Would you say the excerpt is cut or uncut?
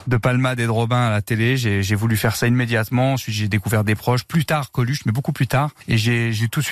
uncut